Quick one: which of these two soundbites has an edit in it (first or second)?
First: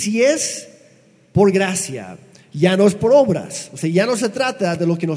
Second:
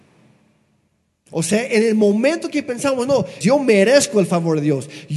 second